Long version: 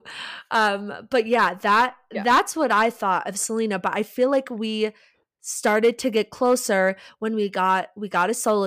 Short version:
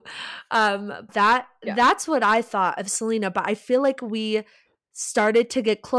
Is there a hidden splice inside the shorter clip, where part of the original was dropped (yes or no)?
yes